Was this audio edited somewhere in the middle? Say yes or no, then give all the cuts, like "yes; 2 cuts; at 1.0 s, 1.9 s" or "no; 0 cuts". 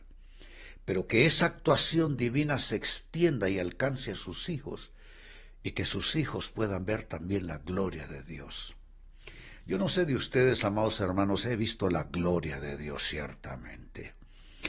no; 0 cuts